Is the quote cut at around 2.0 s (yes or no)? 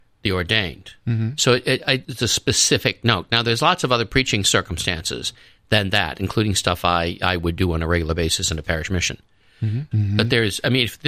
yes